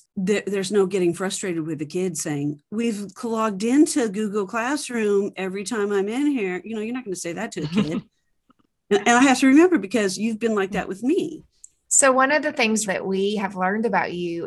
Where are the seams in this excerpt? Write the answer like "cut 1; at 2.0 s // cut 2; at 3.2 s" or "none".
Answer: cut 1; at 12.9 s